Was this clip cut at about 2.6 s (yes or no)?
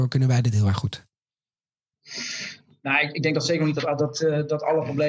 no